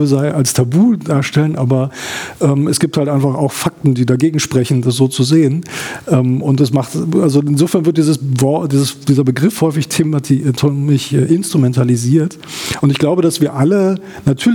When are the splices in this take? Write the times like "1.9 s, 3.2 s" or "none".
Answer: none